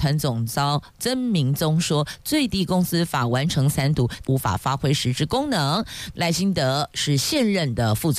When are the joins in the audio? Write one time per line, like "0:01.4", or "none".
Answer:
0:04.2
0:06.1

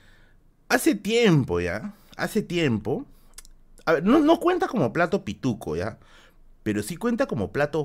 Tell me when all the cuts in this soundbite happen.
none

